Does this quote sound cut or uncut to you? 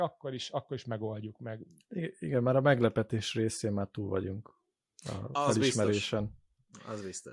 uncut